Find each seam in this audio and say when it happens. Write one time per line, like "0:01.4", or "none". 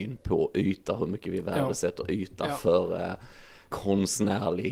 0:03.7